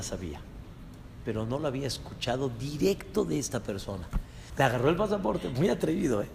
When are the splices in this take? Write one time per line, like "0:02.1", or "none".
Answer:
0:04.5